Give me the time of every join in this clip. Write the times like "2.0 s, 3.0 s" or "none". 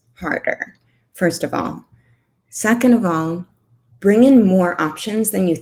3.9 s

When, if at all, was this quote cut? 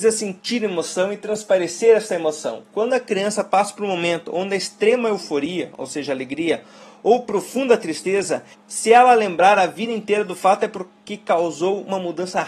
8.5 s

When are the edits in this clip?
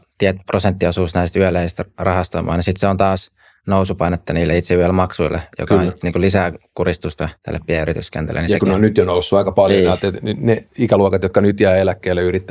6.0 s, 7.4 s

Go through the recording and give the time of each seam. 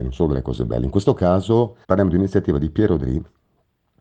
1.8 s

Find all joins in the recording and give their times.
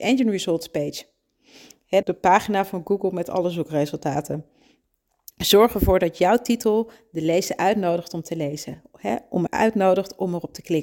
2.0 s, 9.5 s

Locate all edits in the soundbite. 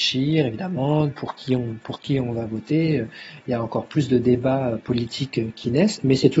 none

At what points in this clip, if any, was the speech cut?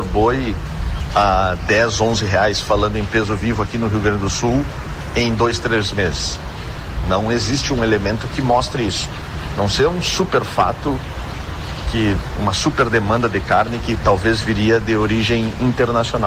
none

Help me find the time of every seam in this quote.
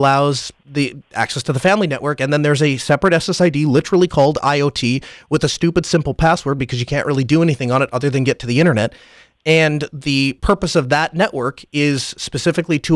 none

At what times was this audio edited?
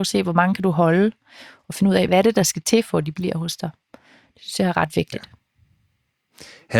2.1 s

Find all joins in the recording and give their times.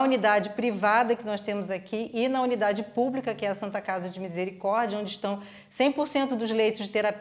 none

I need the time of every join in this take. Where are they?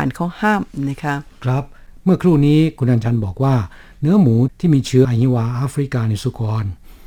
5.0 s

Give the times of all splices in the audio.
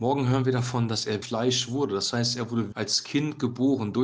1.2 s, 2.7 s

